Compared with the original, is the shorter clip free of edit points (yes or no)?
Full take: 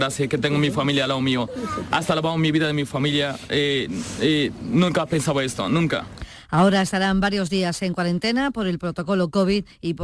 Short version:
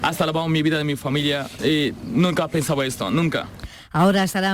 no